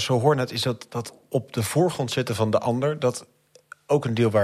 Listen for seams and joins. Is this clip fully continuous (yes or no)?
yes